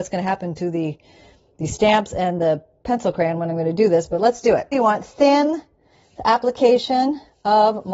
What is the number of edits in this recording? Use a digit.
1